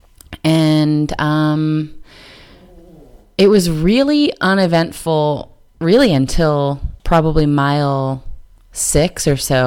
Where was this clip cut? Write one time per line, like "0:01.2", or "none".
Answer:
0:05.7
0:07.0